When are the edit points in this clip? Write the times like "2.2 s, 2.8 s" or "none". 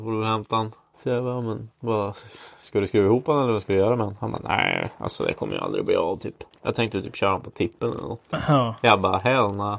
0.9 s